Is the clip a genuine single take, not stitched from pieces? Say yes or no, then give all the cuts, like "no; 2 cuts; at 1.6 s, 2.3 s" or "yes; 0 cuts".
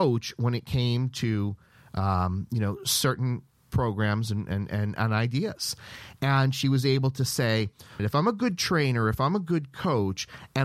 no; 1 cut; at 8.0 s